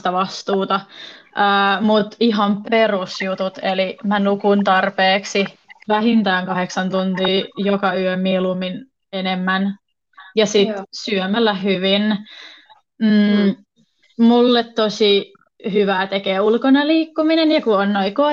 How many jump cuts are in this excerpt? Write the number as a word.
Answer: zero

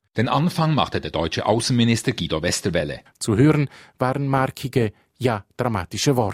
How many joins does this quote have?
one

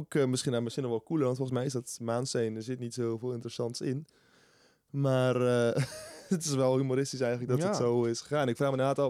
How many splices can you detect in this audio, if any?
zero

